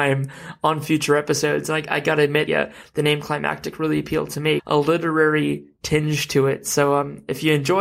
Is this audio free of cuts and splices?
no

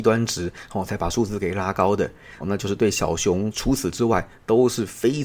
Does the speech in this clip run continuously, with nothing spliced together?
no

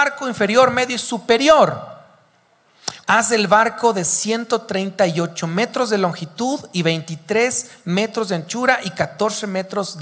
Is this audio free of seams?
no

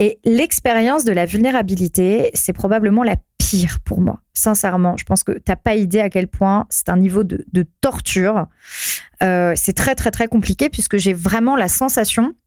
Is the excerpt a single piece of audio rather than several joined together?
yes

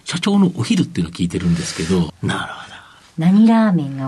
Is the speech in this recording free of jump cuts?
no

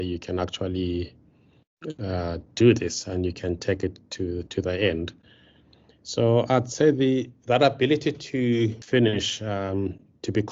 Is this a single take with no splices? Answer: yes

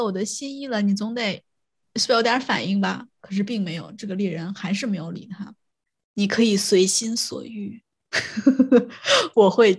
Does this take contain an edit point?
yes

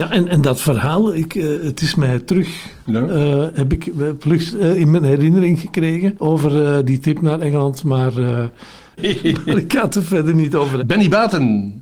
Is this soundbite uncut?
no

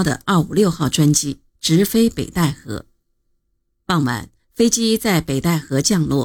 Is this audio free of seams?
yes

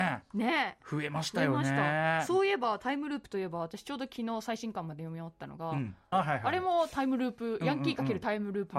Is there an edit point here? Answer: yes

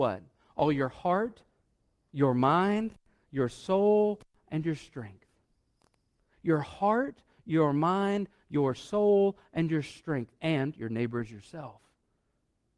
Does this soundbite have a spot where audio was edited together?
no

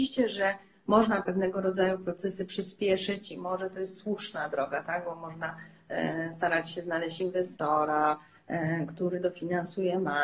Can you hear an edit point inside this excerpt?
no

